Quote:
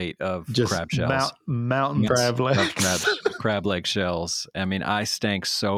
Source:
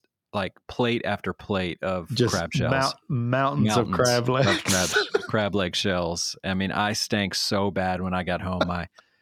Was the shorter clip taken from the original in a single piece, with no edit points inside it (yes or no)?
no